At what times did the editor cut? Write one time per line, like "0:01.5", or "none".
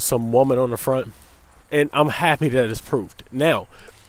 0:01.6